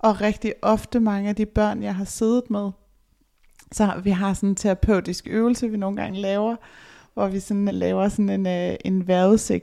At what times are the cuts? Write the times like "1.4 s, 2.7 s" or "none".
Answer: 7.7 s